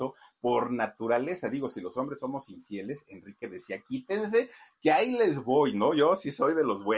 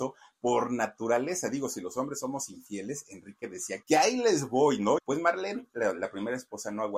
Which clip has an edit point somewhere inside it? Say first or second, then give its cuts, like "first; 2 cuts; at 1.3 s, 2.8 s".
second; 2 cuts; at 3.8 s, 5.0 s